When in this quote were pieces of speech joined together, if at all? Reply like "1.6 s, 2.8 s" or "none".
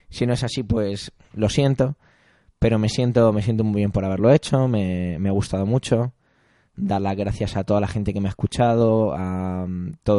none